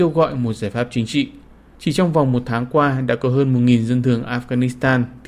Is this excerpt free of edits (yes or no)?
yes